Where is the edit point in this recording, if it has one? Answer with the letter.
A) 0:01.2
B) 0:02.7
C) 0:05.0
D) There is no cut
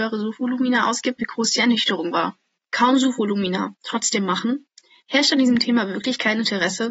A